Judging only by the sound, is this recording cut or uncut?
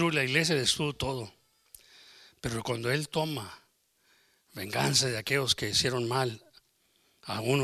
uncut